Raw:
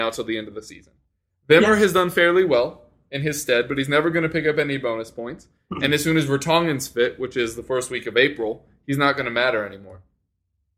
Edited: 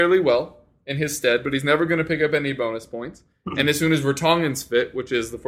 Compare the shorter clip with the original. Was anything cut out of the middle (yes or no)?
no